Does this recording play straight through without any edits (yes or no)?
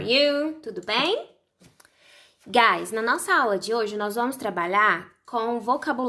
yes